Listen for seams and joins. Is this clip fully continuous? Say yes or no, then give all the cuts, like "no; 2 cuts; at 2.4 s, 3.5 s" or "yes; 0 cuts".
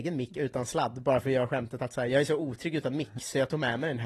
yes; 0 cuts